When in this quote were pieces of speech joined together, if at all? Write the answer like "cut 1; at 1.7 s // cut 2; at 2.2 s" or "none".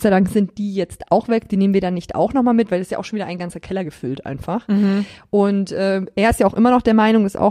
none